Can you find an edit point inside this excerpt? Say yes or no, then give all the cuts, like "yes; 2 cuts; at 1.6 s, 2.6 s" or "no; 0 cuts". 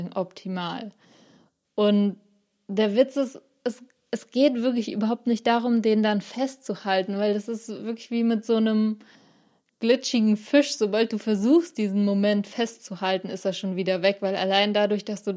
no; 0 cuts